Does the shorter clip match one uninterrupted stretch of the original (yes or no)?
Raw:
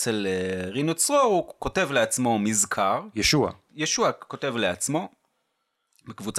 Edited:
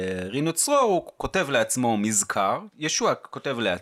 no